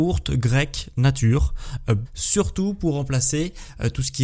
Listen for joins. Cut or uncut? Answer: cut